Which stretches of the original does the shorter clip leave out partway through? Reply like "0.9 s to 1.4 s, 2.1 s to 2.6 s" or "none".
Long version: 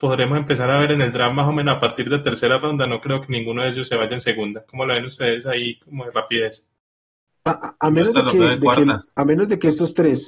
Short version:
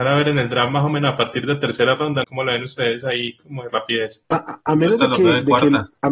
2.9 s to 4.7 s, 6.6 s to 7.4 s

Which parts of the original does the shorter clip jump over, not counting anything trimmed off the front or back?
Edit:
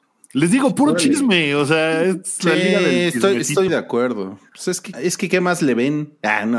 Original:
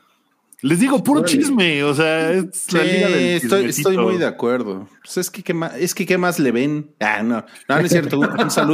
4.0 s to 4.2 s, 5.4 s to 5.7 s

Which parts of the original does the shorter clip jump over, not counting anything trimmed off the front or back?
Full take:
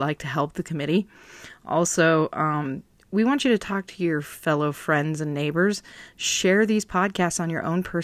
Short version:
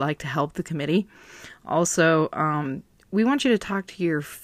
none

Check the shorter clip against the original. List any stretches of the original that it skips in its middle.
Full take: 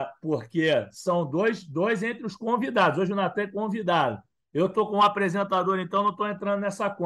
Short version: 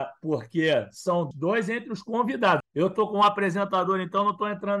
1.3 s to 1.6 s, 2.9 s to 4.4 s

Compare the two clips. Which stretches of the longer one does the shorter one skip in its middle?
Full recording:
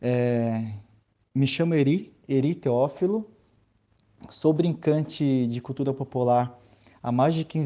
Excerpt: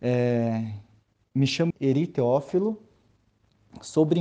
1.7 s to 2.2 s

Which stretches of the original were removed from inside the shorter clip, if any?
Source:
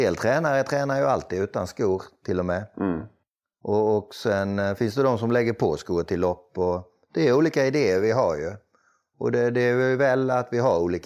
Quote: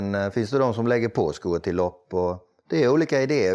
none

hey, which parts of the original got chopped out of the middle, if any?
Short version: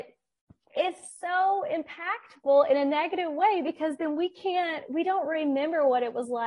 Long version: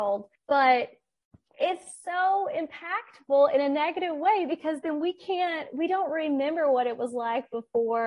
none

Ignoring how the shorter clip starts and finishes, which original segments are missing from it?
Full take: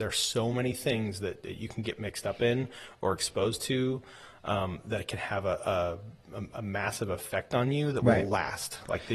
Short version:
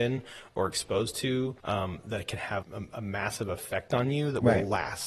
4.0 s to 4.4 s, 5.4 s to 6.2 s

